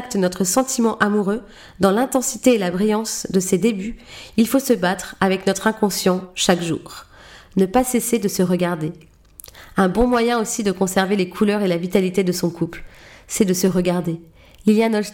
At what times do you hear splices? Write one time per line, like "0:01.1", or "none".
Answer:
none